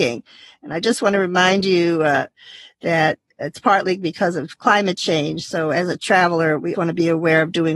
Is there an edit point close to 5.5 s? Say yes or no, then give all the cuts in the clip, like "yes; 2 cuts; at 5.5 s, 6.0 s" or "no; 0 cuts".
no; 1 cut; at 6.7 s